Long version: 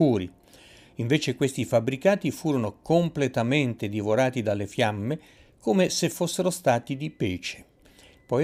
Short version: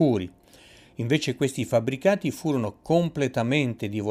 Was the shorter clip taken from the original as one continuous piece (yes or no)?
yes